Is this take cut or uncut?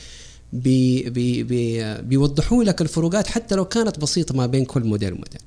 uncut